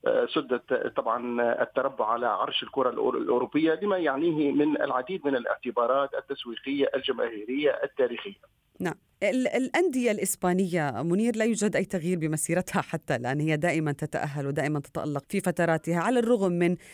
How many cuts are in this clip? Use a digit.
1